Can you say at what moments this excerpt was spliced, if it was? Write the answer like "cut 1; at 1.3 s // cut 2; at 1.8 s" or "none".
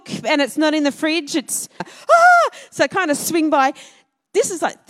cut 1; at 1.8 s